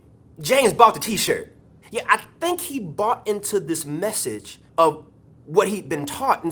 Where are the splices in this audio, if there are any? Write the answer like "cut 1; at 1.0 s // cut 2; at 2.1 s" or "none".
cut 1; at 1.8 s // cut 2; at 4.7 s